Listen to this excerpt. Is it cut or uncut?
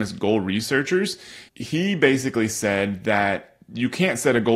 cut